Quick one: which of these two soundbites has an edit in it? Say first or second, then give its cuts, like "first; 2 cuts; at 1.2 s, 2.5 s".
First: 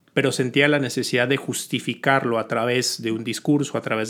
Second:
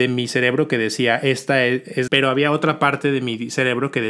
second; 1 cut; at 2.1 s